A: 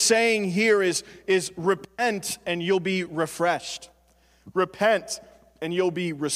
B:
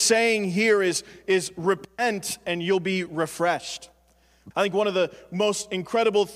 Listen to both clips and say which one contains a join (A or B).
B